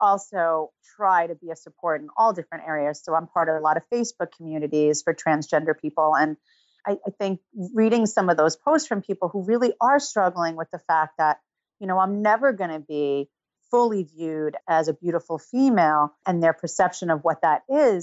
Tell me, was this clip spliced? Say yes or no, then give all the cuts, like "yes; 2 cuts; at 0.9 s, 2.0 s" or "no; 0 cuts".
yes; 2 cuts; at 14.6 s, 16.2 s